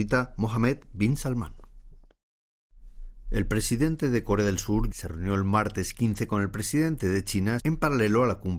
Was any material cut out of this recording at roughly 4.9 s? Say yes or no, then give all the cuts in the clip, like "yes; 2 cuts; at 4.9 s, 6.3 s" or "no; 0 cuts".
yes; 2 cuts; at 4.9 s, 7.6 s